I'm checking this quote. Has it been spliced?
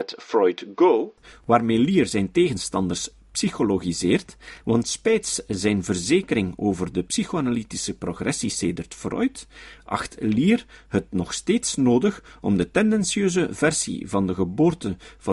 yes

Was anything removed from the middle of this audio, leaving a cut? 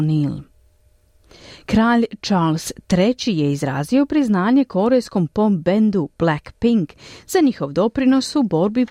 no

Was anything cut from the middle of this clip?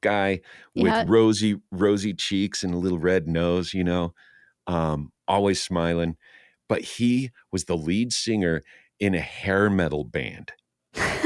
no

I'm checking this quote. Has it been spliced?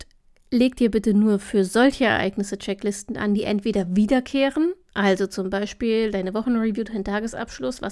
no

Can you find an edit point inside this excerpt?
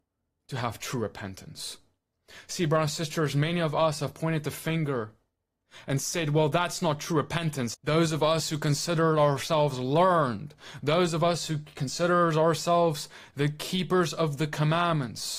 yes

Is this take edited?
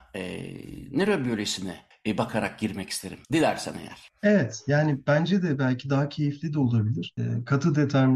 yes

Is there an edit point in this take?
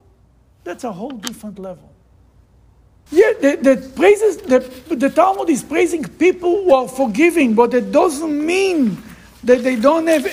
yes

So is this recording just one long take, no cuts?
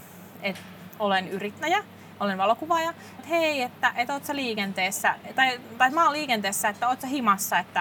no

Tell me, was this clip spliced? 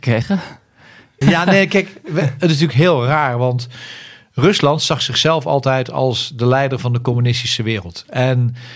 yes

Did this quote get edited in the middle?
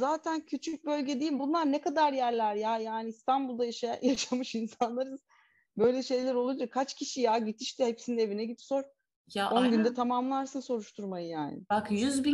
no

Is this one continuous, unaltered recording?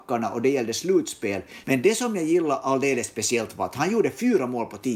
no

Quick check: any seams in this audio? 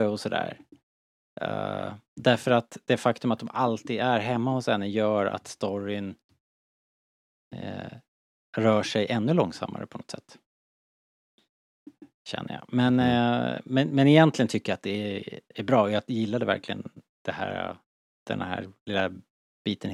no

